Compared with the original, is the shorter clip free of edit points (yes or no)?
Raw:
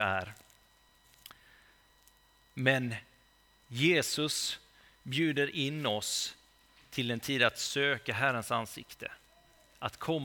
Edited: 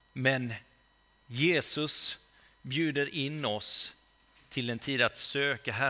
yes